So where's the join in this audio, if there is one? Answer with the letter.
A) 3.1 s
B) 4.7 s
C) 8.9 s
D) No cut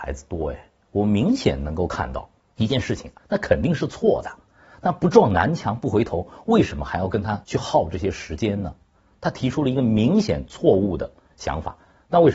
A